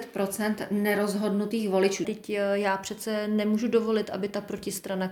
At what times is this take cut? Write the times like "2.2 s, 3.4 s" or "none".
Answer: 2.0 s